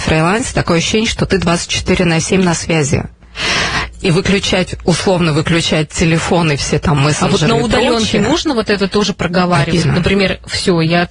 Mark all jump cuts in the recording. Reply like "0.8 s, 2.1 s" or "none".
9.8 s